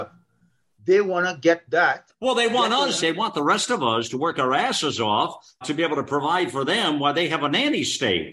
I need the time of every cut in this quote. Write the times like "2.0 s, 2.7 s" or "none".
3.0 s, 5.6 s